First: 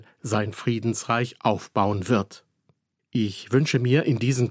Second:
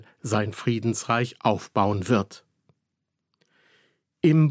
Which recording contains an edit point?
first; 1 cut; at 3.0 s

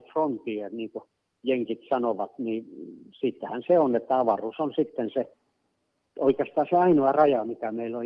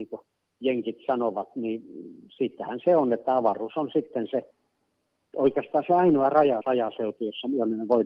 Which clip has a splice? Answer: second; 1 cut; at 6.6 s

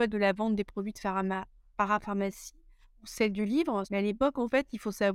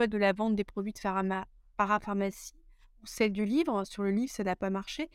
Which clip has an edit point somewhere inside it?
first; 1 cut; at 3.8 s

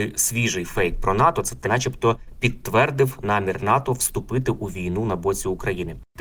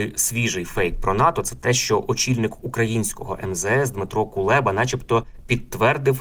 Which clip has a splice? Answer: first; 1 cut; at 1.7 s

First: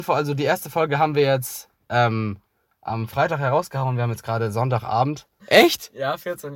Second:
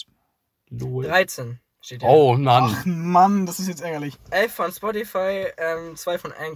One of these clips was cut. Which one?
first; 1 cut; at 5.4 s

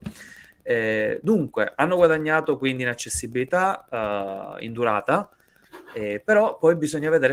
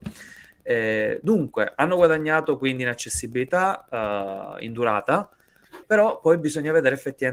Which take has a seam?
second; 1 cut; at 5.8 s

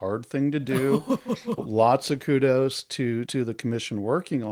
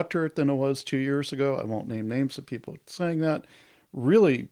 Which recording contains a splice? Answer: first; 2 cuts; at 1.6 s, 3.3 s

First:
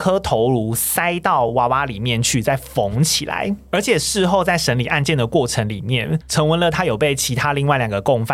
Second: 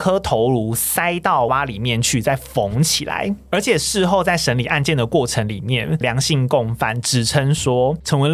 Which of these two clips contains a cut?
second; 2 cuts; at 1.5 s, 6.0 s

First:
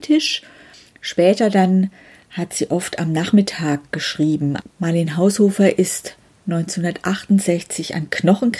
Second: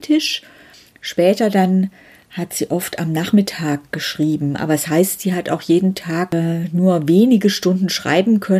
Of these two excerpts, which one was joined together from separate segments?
first; 1 cut; at 4.6 s

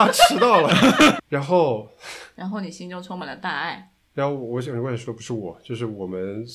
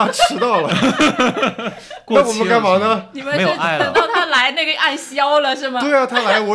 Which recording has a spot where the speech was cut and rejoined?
first; 1 cut; at 1.2 s

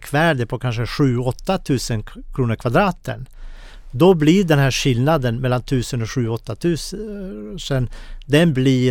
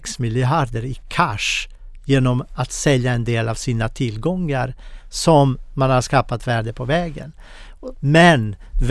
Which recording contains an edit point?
second; 1 cut; at 7.9 s

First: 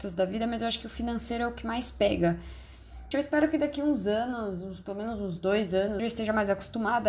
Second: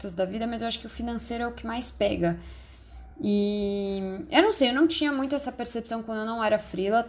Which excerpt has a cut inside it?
first; 2 cuts; at 3.1 s, 6.0 s

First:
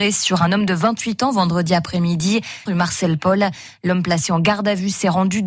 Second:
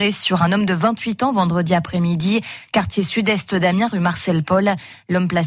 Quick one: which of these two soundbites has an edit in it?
first; 1 cut; at 2.7 s

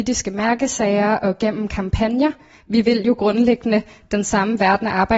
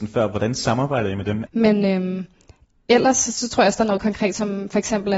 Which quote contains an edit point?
second; 1 cut; at 1.5 s

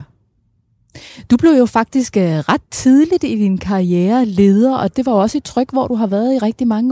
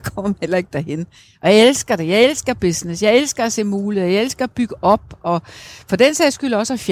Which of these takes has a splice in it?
first; 1 cut; at 4.9 s

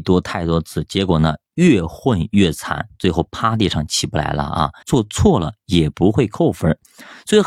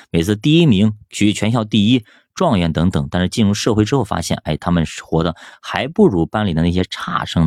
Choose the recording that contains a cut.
first; 1 cut; at 4.8 s

